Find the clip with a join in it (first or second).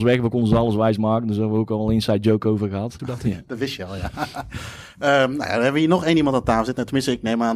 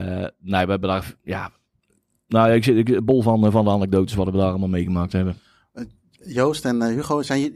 first